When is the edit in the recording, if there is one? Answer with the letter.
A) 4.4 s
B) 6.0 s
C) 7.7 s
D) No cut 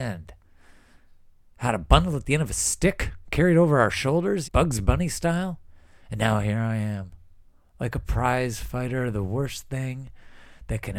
A